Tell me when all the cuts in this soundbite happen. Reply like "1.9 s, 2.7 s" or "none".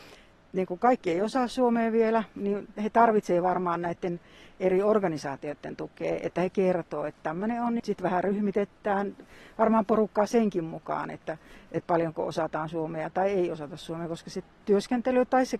7.8 s